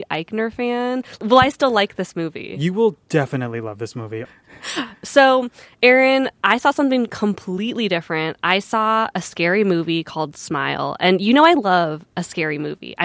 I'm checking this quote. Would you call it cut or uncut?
uncut